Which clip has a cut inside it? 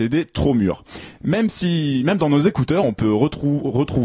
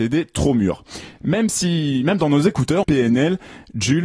second; 1 cut; at 2.8 s

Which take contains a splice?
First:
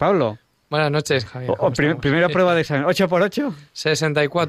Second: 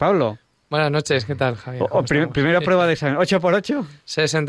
first; 1 cut; at 1.3 s

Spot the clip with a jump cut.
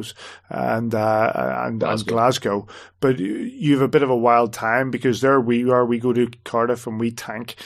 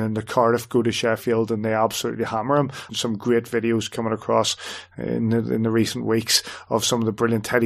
second; 1 cut; at 2.9 s

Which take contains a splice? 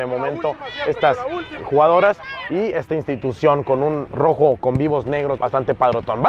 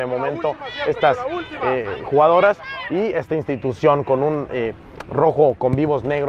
first; 3 cuts; at 1.6 s, 4.1 s, 5.4 s

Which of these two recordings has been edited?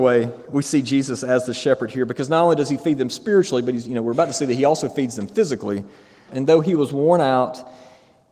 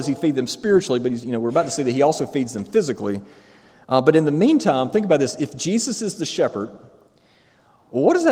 first; 1 cut; at 6.3 s

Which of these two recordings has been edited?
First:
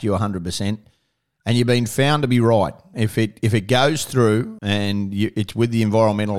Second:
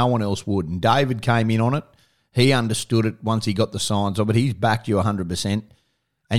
first; 2 cuts; at 2.9 s, 4.6 s

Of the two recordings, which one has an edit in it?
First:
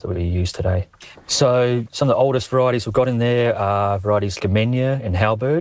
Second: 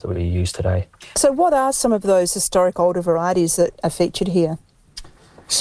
first; 2 cuts; at 1.1 s, 4.4 s

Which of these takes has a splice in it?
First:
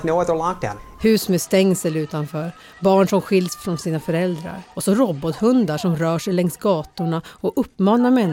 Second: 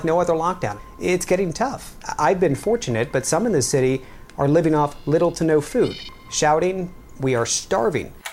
first; 2 cuts; at 1.0 s, 4.7 s

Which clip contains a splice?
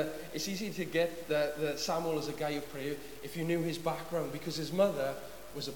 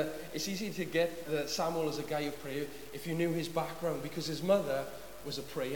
second; 1 cut; at 1.3 s

